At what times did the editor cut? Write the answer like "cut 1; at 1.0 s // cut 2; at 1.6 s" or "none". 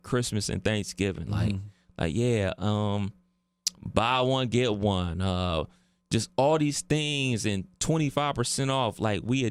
none